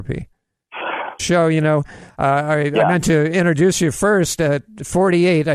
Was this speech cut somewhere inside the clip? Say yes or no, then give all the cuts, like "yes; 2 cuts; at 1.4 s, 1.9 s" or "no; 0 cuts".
yes; 1 cut; at 1.2 s